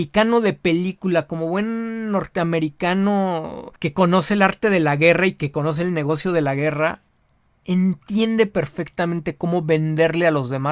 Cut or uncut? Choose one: cut